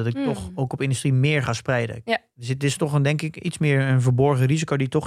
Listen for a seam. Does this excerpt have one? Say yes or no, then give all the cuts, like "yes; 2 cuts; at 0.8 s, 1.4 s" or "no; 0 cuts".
no; 0 cuts